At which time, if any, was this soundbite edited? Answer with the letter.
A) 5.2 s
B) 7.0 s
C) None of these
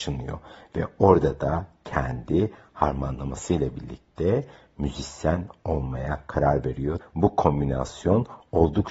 B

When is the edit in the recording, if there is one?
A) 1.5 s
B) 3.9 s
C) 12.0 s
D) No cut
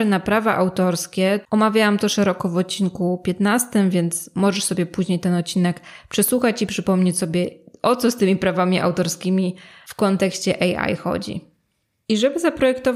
A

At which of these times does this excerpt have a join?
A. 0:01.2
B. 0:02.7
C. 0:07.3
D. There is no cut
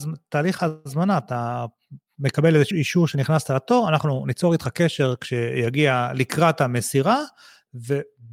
B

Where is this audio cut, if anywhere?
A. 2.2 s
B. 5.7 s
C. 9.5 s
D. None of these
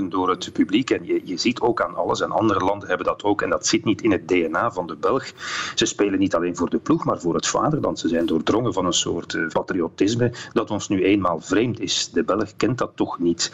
C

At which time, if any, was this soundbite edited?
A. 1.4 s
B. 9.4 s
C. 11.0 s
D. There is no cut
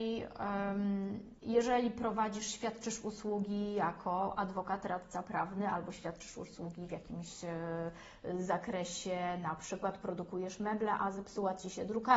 A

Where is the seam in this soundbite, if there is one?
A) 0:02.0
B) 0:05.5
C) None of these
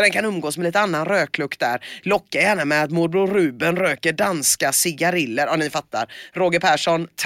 C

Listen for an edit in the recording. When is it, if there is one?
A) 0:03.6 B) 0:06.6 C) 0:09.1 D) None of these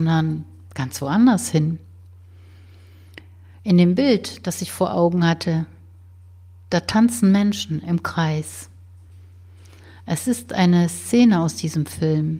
D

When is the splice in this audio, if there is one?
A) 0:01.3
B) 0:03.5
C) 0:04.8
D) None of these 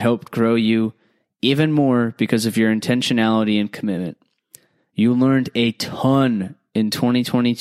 D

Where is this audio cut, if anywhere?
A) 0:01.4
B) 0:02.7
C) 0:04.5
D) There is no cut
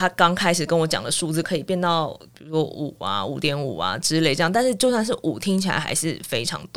A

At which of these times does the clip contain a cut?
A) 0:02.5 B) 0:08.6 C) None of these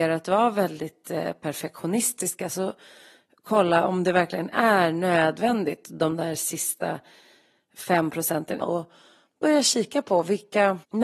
B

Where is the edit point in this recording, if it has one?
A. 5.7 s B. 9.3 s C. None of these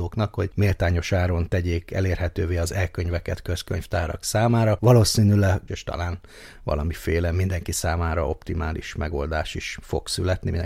A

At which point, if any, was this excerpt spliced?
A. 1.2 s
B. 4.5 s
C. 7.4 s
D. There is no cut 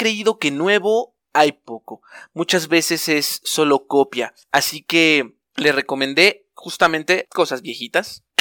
A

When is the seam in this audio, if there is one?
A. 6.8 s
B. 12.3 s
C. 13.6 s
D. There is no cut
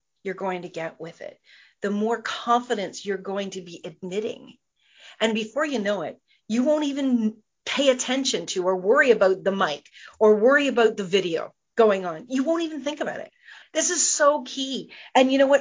C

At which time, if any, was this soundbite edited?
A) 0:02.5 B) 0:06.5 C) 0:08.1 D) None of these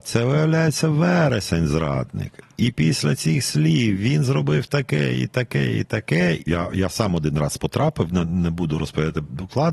B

